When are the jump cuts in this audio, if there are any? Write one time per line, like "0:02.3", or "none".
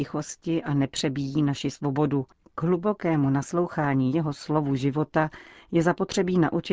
0:02.4